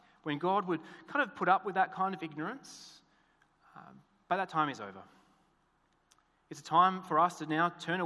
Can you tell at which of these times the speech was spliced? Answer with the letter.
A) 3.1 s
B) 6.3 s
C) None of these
C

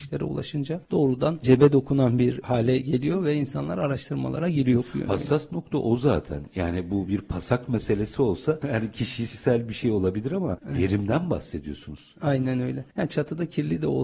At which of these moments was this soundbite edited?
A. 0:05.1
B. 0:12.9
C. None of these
C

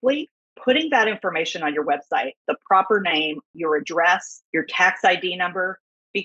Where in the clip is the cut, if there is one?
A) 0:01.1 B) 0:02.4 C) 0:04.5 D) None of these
B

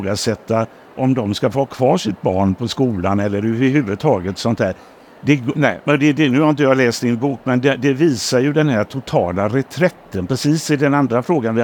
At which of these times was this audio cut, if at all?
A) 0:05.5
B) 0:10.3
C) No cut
A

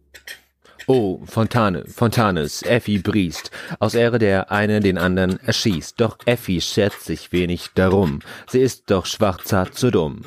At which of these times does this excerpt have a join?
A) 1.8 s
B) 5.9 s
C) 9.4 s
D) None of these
C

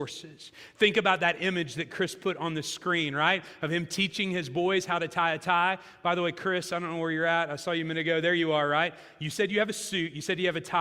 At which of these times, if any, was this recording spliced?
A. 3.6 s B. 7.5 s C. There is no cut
C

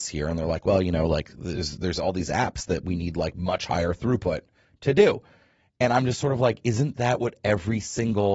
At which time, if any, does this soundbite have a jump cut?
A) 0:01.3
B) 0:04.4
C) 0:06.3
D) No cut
D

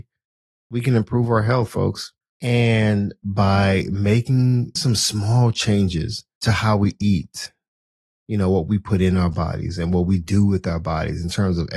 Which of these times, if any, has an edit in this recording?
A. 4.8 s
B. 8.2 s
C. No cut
A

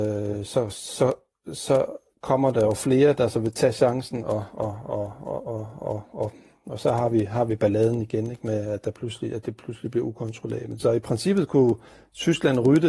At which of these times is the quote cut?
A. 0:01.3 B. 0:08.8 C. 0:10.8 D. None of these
C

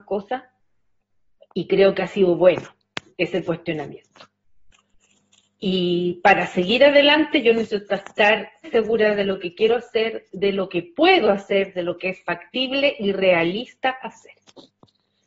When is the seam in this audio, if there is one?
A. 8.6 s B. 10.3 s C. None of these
A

